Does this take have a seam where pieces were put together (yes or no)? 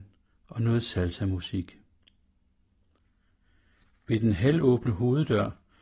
no